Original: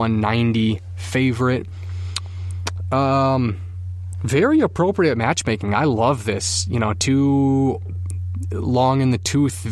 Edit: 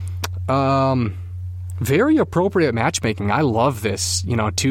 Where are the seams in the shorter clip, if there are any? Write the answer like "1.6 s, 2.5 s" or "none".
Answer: none